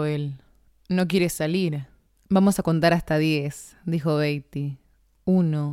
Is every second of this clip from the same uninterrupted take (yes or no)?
no